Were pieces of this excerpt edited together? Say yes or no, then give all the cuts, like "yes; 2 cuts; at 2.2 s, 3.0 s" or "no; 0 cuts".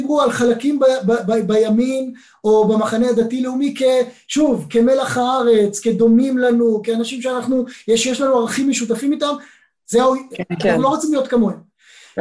yes; 1 cut; at 9.9 s